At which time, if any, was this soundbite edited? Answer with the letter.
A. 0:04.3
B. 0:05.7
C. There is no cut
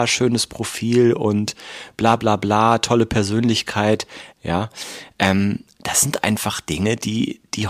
A